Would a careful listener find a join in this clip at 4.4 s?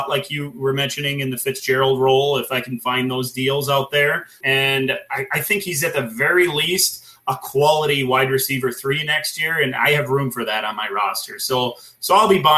yes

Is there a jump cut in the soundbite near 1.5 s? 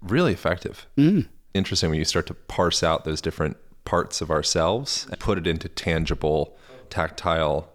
yes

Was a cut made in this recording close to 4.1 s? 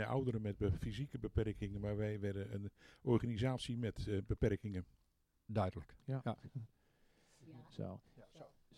no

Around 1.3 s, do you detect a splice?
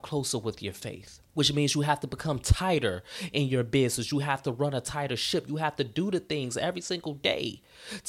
yes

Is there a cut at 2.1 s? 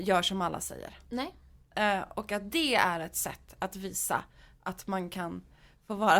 no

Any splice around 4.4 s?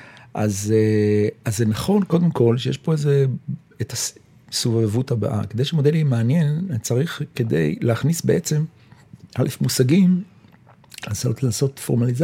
no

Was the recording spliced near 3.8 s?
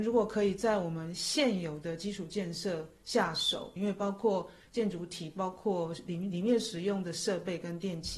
yes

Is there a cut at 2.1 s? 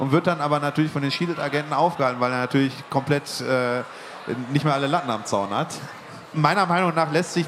no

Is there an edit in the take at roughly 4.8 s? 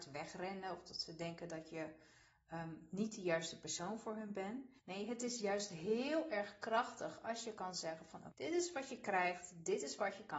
yes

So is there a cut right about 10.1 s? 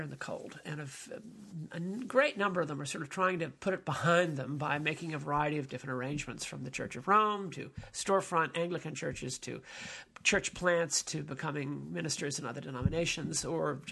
no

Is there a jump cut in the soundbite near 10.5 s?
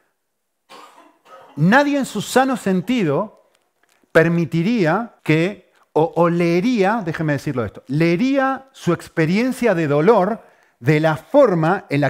no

